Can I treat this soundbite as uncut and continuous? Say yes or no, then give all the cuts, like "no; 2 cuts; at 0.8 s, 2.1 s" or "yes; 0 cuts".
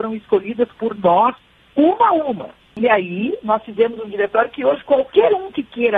yes; 0 cuts